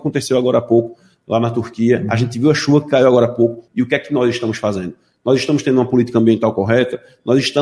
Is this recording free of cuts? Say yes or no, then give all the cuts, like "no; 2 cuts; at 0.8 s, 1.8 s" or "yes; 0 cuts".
no; 1 cut; at 3.7 s